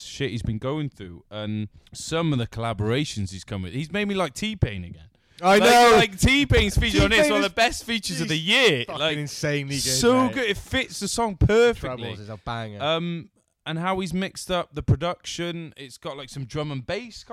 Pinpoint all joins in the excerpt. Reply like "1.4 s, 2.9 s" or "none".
1.9 s